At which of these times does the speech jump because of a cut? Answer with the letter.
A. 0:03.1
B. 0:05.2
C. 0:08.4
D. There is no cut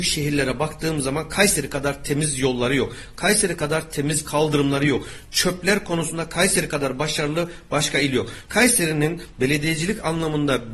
C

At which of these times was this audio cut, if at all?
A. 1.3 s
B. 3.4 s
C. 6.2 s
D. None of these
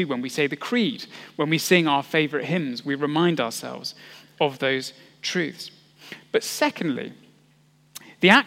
D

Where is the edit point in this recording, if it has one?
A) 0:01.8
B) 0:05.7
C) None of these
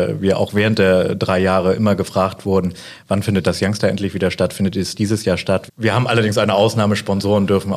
B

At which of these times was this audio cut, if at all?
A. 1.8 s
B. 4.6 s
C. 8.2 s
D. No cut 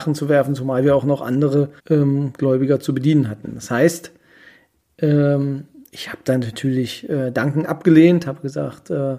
A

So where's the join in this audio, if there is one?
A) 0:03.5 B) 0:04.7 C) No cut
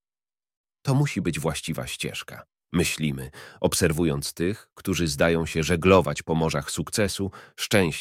C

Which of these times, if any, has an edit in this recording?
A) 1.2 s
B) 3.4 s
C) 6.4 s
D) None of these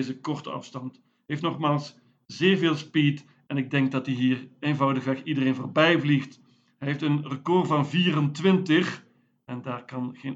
D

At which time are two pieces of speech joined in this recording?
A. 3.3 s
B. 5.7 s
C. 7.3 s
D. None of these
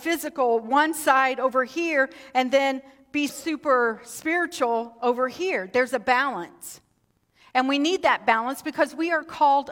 A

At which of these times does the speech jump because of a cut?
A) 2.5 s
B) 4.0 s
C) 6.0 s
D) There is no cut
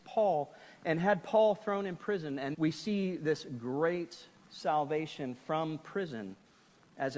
A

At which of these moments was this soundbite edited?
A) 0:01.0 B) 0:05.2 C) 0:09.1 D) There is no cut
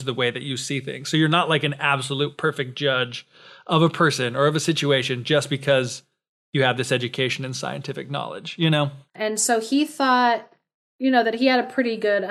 C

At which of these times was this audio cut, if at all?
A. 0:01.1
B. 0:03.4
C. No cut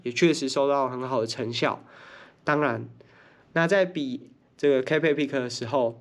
B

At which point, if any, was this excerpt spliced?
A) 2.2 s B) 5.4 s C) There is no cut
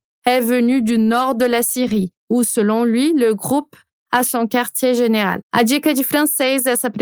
B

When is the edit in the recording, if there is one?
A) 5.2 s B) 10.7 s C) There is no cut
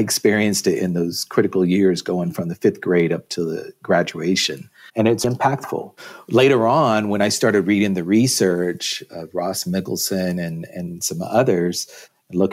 A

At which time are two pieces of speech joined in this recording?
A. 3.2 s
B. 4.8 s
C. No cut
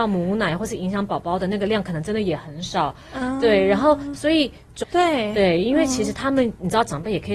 B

